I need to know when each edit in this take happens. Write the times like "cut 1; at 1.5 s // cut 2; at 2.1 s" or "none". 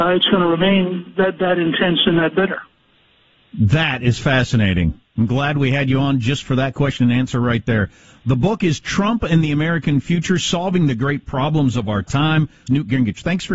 cut 1; at 12.7 s